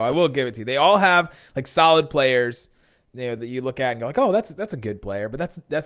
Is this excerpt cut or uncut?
uncut